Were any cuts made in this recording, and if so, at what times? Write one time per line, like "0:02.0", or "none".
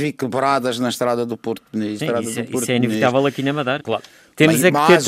0:02.0
0:03.8